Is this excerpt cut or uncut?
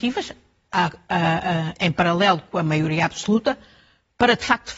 cut